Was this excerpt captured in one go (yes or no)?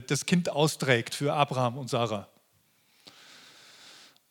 yes